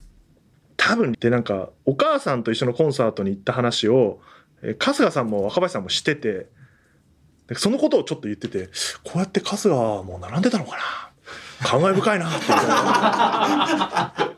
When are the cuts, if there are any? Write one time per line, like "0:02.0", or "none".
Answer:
0:01.1